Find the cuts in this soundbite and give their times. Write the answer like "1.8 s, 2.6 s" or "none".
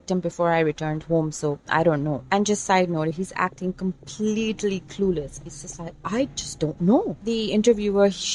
3.1 s

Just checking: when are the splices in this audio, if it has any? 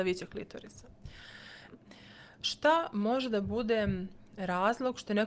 1.7 s

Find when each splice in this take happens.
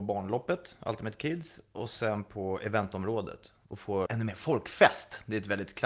4.1 s

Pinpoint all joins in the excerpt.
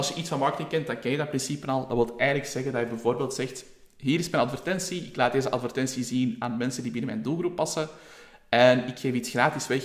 none

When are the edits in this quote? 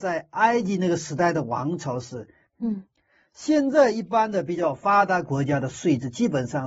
2.5 s

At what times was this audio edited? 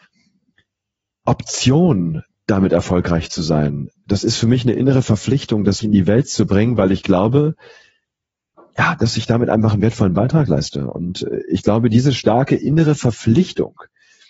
5.8 s

